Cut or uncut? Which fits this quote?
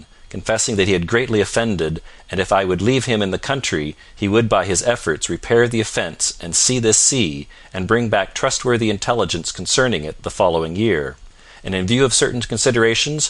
uncut